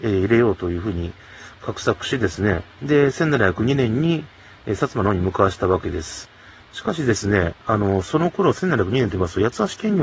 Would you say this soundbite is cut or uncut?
cut